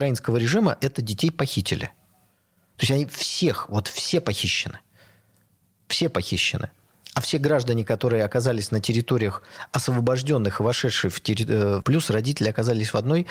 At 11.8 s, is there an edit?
yes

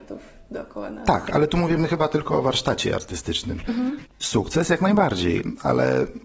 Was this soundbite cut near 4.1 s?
yes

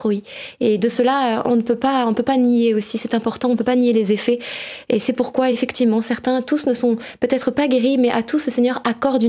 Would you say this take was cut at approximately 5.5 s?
no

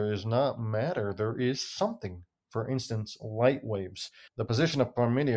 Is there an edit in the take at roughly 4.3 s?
yes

